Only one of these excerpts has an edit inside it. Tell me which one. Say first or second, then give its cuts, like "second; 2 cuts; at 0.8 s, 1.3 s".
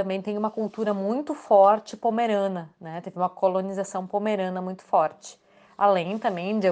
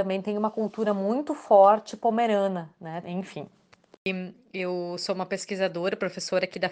second; 1 cut; at 3.0 s